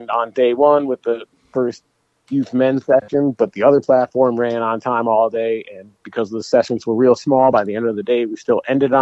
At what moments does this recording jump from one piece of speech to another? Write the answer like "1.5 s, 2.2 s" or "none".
none

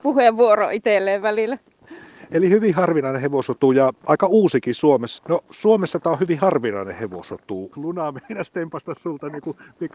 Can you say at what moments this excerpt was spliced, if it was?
4.0 s, 5.2 s, 7.7 s

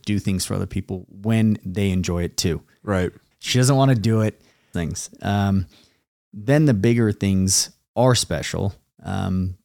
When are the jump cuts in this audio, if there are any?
3.3 s, 4.7 s

